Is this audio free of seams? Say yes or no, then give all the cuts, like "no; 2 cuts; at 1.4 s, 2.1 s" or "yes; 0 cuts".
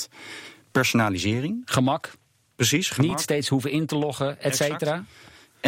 yes; 0 cuts